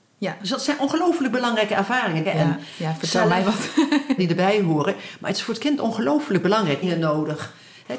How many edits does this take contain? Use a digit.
3